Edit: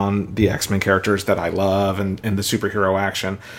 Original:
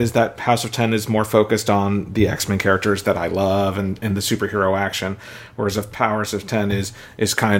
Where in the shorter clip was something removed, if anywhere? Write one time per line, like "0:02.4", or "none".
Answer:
none